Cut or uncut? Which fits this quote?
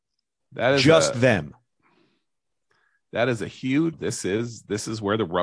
cut